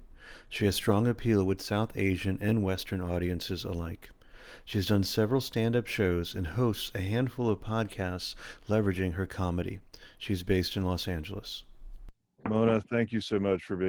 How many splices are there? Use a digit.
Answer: 0